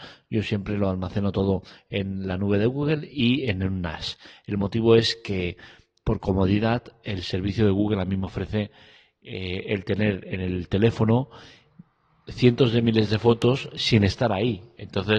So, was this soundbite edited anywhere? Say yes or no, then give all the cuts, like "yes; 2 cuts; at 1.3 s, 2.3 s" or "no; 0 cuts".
no; 0 cuts